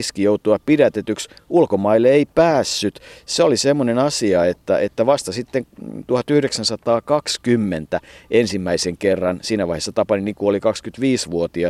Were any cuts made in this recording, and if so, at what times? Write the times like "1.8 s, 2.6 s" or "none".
none